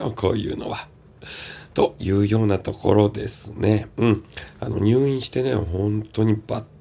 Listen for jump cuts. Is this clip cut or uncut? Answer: uncut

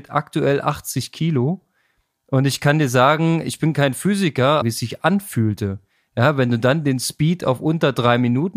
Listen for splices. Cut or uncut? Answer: cut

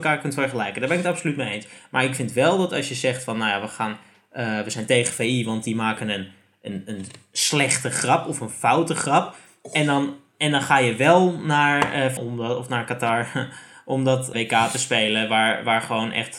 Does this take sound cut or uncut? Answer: cut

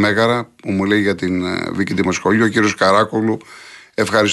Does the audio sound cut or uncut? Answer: uncut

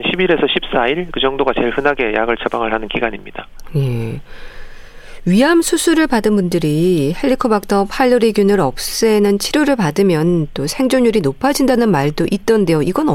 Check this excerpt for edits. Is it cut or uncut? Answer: uncut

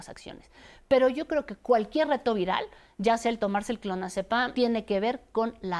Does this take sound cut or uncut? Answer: cut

